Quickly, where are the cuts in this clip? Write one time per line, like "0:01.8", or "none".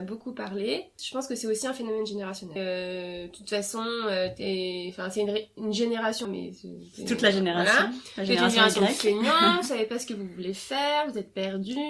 0:01.0
0:02.6
0:06.2